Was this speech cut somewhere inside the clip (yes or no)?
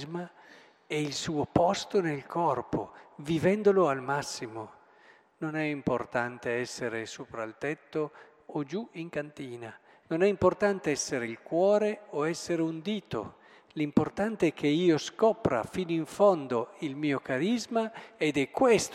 yes